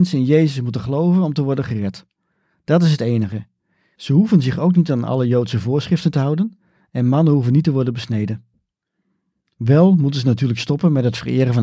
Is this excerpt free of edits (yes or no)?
yes